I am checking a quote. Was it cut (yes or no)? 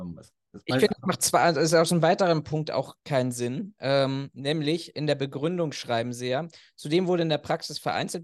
no